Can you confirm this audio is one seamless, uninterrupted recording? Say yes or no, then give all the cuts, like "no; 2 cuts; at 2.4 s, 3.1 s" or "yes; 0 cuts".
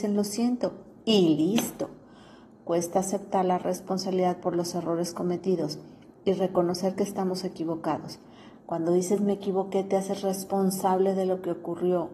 no; 1 cut; at 8.6 s